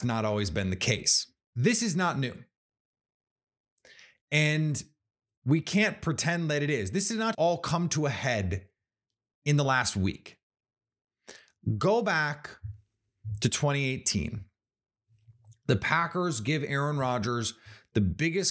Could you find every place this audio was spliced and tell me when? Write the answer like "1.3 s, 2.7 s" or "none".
7.3 s